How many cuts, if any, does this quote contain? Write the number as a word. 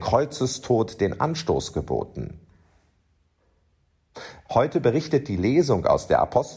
one